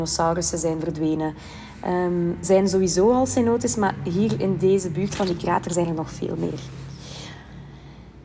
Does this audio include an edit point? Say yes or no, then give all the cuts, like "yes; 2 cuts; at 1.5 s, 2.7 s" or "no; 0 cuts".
yes; 1 cut; at 2.4 s